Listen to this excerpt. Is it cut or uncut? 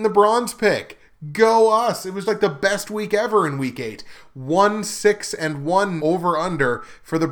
cut